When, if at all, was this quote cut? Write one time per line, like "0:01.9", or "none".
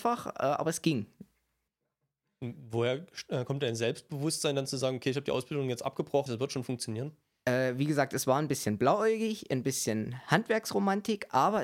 0:06.3

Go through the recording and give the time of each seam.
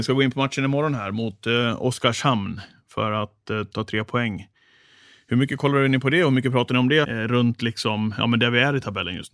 0:03.7
0:07.0

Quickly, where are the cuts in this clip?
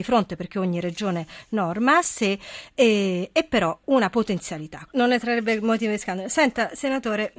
0:03.8
0:04.9

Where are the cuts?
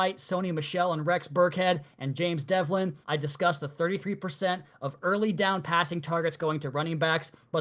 0:03.0

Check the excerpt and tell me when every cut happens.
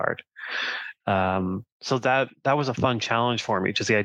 0:01.0

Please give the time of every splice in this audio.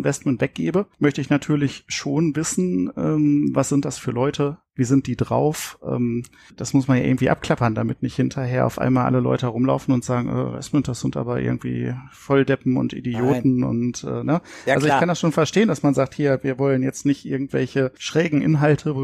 none

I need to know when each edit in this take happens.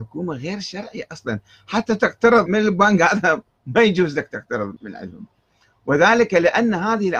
0:02.5
0:04.8

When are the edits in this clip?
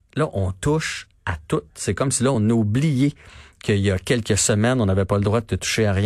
none

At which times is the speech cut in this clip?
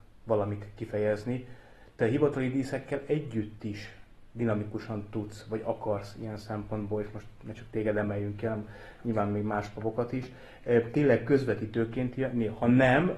none

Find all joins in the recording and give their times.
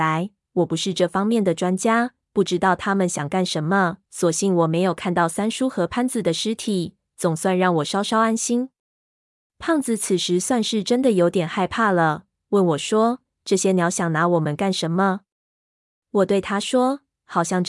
0:04.0

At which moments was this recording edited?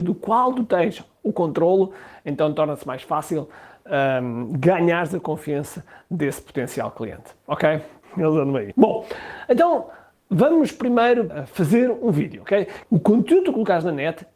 0:08.0
0:12.8

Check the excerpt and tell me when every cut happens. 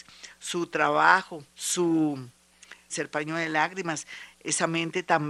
0:01.5
0:02.9
0:04.3

